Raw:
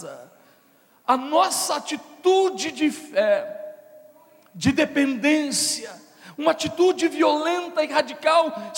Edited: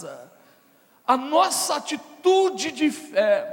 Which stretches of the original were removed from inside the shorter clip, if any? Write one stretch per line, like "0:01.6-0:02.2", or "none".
none